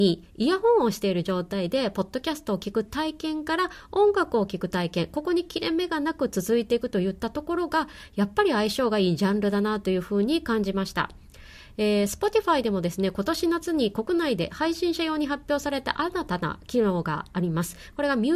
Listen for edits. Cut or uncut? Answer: uncut